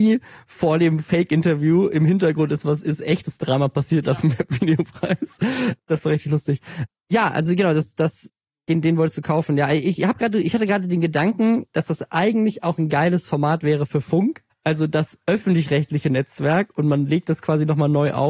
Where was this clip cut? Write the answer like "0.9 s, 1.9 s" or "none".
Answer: none

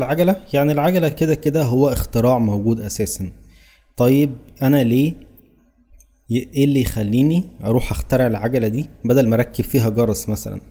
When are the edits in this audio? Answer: none

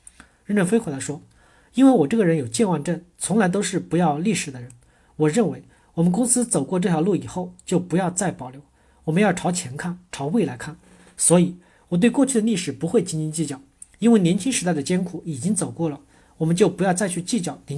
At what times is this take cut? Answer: none

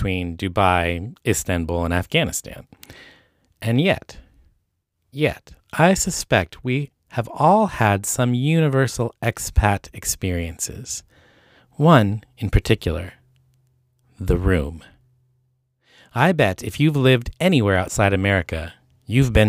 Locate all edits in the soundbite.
none

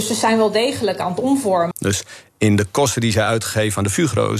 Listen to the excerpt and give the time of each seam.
1.7 s

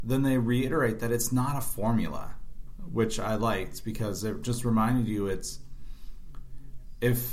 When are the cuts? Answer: none

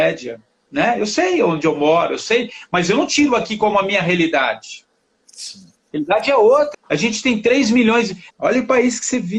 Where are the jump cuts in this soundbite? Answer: 6.7 s, 8.3 s

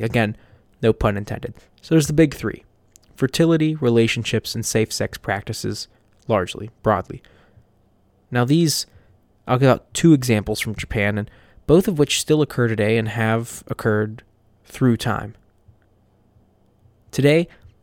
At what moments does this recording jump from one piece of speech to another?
8.1 s

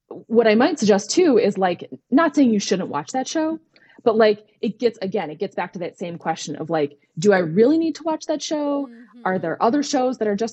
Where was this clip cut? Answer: none

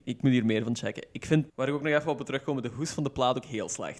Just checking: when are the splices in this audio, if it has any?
1.5 s

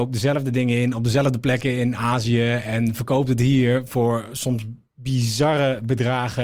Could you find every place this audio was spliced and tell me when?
none

